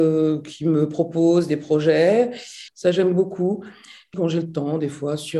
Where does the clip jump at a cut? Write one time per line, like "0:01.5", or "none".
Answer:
0:02.7
0:04.1